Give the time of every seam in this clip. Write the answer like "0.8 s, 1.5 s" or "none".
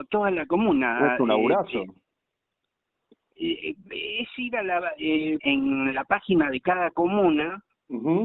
5.4 s